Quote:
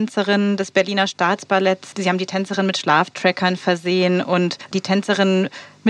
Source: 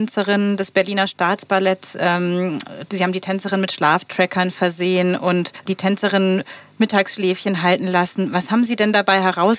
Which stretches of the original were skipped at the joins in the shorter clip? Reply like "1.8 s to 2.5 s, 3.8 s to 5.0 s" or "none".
1.9 s to 2.9 s